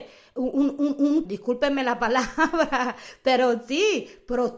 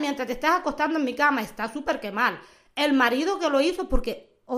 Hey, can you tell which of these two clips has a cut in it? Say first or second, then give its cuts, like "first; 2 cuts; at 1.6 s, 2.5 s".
first; 1 cut; at 1.2 s